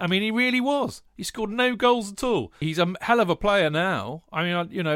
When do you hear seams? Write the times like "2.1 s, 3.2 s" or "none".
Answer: 2.6 s